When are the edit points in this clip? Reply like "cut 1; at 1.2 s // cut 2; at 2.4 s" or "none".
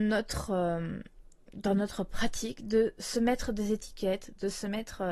none

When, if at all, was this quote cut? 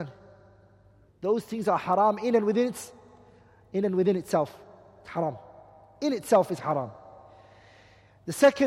cut 1; at 1.1 s

